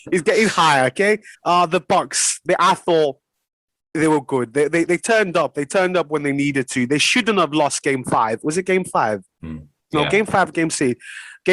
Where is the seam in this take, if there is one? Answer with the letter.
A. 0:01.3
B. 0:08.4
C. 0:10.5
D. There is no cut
A